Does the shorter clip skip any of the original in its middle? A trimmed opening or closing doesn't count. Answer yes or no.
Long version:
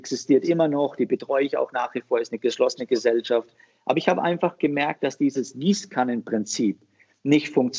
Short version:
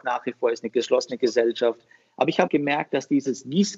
yes